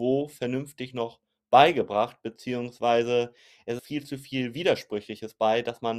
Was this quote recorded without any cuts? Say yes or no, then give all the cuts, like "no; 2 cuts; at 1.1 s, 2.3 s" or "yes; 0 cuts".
no; 1 cut; at 3.8 s